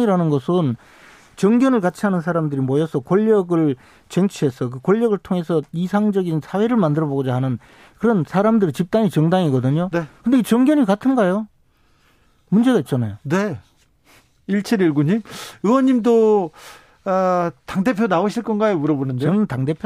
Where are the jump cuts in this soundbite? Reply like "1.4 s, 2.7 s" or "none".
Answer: none